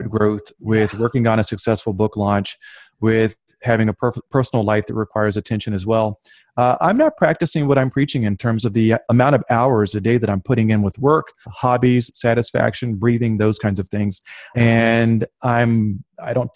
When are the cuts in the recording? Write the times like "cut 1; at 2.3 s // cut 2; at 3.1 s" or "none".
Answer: cut 1; at 11.4 s // cut 2; at 14.5 s